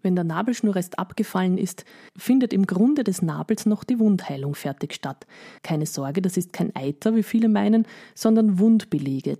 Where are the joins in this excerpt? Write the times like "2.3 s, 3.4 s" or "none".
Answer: 5.6 s